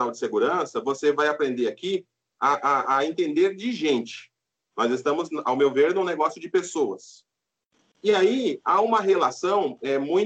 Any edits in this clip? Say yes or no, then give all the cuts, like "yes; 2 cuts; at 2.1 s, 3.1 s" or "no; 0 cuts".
yes; 2 cuts; at 4.6 s, 7.8 s